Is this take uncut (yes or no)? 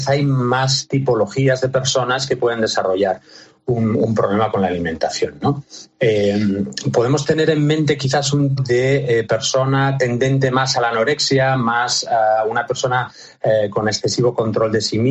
no